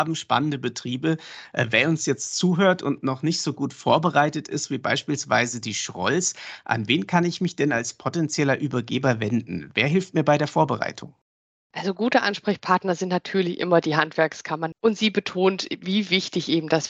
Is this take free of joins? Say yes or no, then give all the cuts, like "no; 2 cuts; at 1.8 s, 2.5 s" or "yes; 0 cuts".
no; 1 cut; at 14.7 s